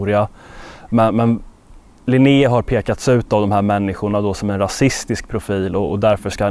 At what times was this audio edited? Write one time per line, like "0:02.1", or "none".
0:02.0